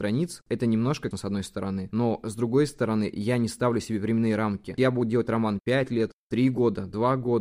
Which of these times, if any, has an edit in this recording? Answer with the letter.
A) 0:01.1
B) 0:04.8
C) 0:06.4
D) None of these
A